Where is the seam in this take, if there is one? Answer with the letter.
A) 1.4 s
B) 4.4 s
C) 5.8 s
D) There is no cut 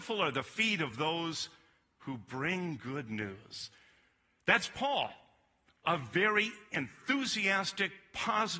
D